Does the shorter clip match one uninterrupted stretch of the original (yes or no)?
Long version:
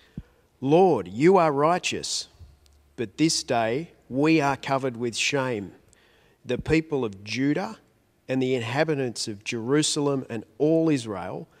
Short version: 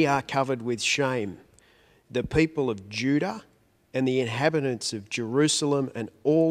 yes